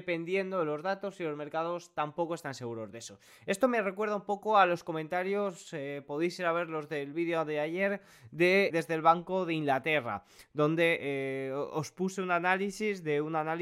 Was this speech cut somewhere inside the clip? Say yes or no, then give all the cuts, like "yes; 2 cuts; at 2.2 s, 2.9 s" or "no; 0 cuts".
yes; 1 cut; at 8.7 s